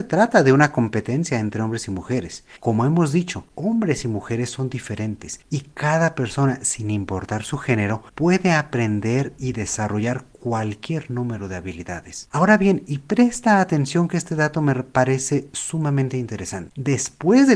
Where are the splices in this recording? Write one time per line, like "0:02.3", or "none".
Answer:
0:02.6
0:12.3